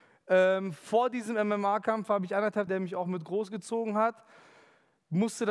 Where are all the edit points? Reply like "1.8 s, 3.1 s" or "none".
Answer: 2.7 s